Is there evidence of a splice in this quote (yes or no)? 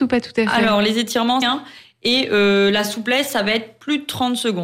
yes